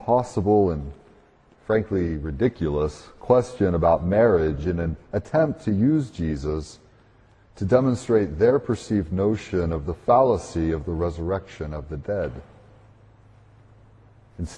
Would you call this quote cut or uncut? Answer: uncut